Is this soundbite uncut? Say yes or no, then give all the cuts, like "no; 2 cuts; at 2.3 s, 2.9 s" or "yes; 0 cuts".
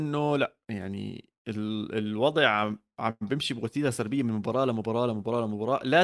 yes; 0 cuts